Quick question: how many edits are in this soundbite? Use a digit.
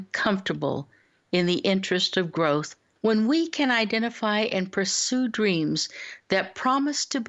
1